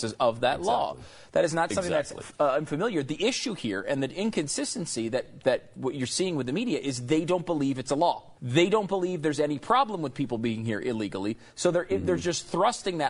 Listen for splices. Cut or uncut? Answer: cut